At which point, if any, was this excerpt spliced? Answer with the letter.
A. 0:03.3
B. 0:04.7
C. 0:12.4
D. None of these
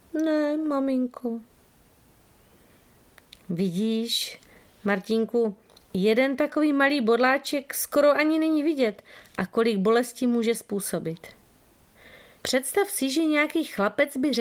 C